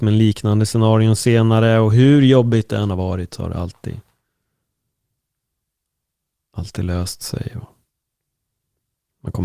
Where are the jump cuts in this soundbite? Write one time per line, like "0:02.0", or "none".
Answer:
none